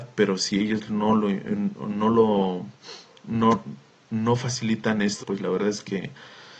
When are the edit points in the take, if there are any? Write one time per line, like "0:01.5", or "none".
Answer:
0:05.2